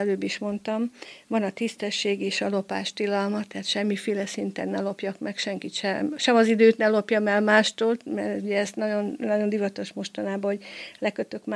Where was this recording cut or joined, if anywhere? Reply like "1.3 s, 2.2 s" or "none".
none